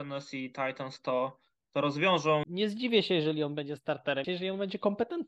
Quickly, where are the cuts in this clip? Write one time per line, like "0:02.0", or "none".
0:02.4
0:04.2